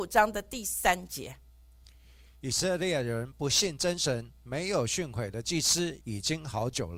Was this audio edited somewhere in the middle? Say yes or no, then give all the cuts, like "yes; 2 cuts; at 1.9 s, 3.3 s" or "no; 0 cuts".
yes; 1 cut; at 6.0 s